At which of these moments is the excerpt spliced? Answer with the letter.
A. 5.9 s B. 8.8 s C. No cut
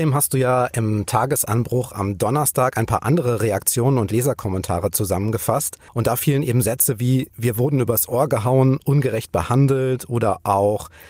A